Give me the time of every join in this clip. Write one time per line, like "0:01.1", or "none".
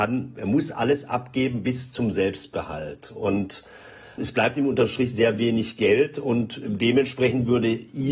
0:04.2